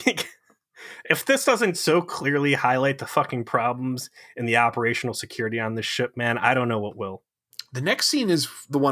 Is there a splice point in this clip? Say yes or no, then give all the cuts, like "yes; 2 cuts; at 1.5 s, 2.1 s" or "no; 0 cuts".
no; 0 cuts